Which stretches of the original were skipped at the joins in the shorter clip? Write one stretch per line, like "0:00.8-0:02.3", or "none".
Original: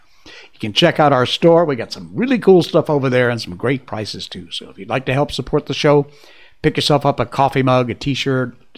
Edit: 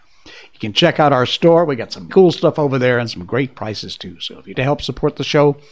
0:02.1-0:02.4
0:04.9-0:05.0